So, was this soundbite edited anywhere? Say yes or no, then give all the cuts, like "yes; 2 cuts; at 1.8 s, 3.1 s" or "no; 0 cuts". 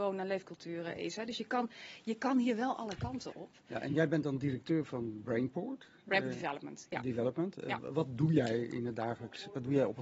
no; 0 cuts